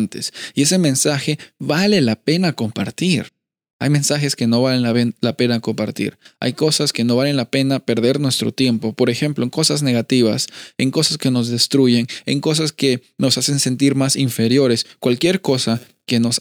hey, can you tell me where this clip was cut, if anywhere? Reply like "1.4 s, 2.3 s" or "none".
none